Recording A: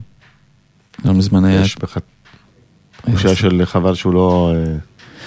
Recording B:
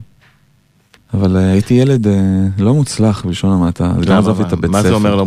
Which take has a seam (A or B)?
B